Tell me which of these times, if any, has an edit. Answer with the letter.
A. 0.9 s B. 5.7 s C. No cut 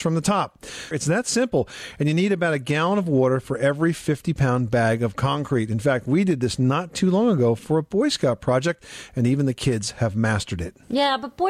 A